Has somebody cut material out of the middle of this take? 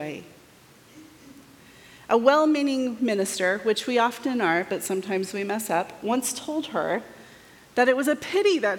no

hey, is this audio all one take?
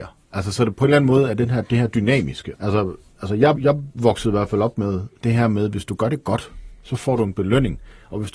no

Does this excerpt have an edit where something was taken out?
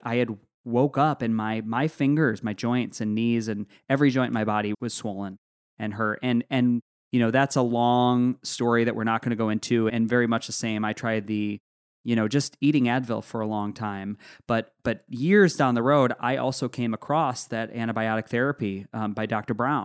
yes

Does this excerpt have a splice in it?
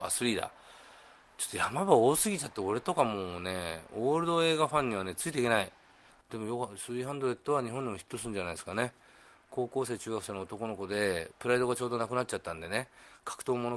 yes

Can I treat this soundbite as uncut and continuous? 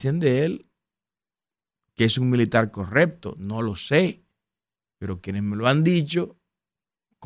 yes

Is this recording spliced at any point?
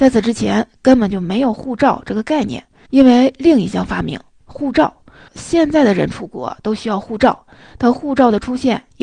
yes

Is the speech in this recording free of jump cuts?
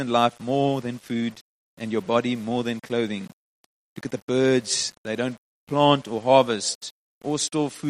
yes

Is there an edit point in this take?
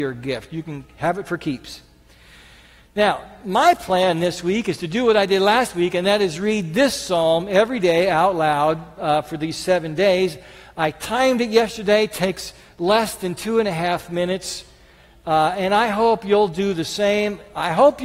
no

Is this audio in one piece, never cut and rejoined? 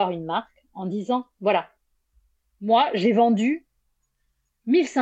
yes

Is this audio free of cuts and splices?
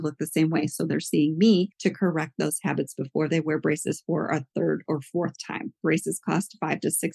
no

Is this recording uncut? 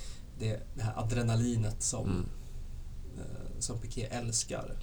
yes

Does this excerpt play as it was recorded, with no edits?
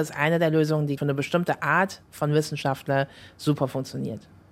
no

